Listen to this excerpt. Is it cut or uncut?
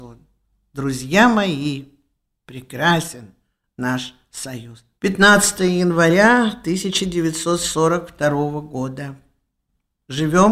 cut